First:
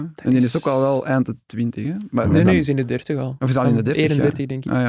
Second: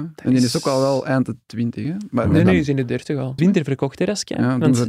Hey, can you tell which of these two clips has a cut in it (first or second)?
second